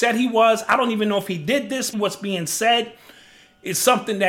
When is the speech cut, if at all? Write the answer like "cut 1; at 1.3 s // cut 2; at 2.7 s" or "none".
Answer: cut 1; at 1.9 s